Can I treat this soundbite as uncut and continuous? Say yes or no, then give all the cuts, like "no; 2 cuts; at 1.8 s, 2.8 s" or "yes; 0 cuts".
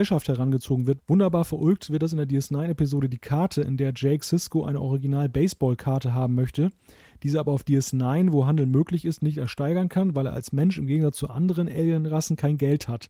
no; 1 cut; at 1.0 s